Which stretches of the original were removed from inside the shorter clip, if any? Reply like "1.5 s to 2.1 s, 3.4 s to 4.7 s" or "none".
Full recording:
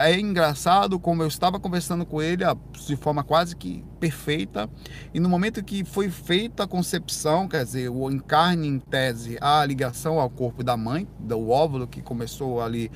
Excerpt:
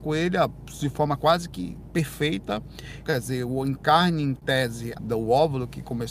5.1 s to 7.5 s, 9.4 s to 11.1 s